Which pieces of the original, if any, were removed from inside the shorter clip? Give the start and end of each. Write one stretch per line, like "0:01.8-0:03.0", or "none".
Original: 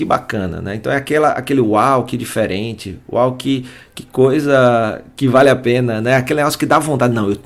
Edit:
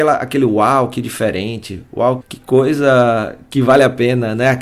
0:03.4-0:03.9